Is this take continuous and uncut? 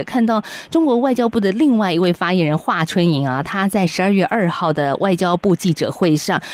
yes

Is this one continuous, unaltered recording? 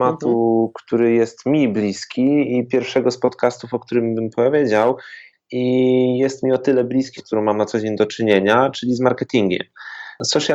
no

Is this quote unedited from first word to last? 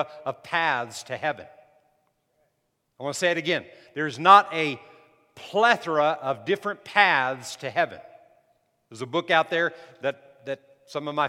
yes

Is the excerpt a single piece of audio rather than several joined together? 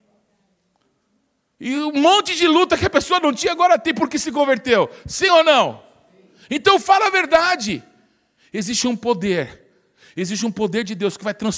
yes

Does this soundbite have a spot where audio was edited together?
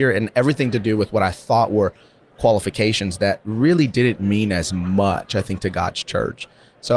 no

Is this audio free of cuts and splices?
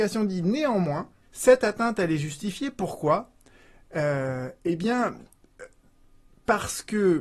no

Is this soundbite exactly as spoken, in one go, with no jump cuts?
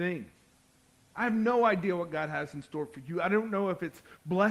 no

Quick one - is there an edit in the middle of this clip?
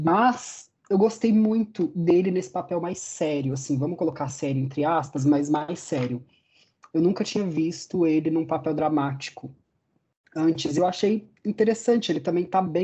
no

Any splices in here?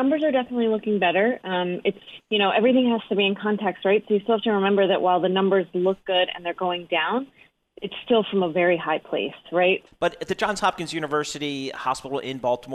yes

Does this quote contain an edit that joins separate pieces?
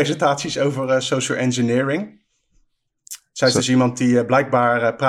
no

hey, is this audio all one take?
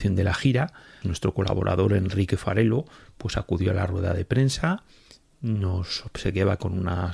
no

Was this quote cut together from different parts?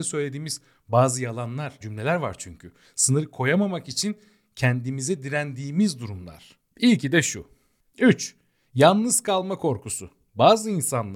yes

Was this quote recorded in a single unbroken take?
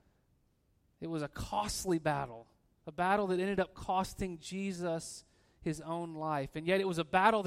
yes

